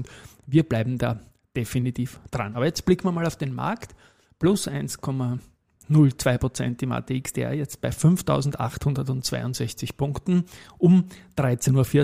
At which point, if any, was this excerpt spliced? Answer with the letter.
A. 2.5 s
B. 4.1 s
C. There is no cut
C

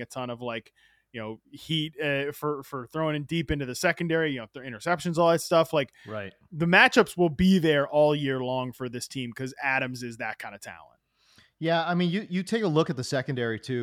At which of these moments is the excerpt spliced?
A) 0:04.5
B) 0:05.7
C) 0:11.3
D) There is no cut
D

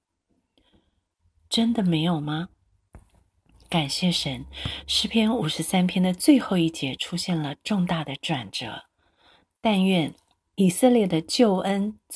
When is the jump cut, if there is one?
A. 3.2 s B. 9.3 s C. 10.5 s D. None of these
D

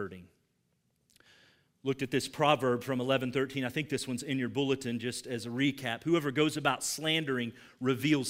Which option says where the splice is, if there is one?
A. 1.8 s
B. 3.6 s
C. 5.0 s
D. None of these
D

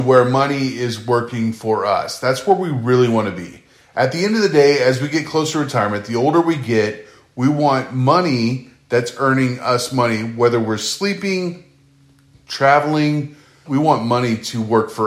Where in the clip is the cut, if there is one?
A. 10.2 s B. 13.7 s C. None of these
B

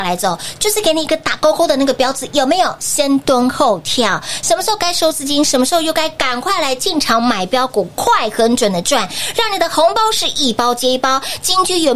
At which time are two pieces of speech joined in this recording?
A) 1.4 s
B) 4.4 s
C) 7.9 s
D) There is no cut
D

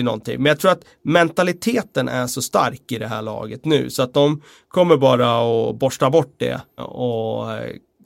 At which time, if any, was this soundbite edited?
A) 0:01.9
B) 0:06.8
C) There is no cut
B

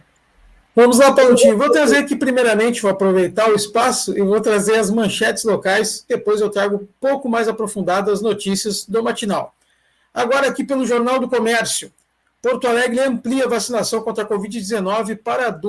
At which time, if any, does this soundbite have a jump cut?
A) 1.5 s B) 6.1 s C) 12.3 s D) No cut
D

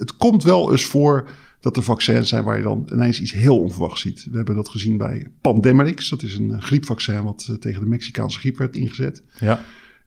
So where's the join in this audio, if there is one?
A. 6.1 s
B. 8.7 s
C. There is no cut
B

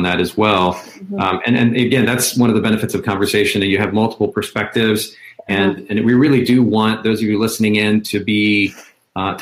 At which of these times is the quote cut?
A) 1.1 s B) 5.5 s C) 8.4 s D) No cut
D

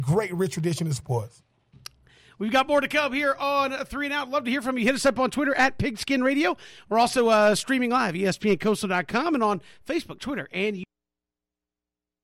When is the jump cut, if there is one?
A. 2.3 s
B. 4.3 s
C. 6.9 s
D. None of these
D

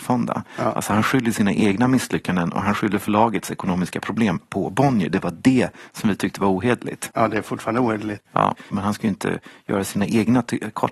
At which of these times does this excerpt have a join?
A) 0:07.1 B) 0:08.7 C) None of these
B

